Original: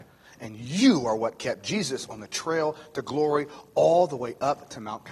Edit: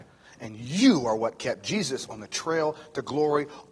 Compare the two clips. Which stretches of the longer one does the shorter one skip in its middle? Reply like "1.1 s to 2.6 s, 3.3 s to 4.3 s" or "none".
none